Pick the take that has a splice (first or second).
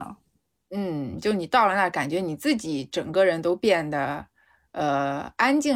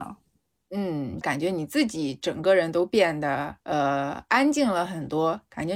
second